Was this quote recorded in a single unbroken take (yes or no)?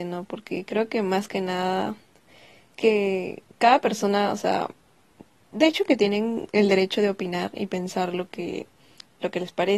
yes